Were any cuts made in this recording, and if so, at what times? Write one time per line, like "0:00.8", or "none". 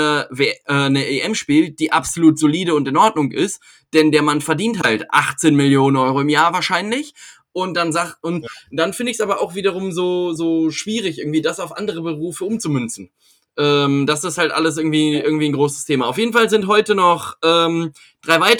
none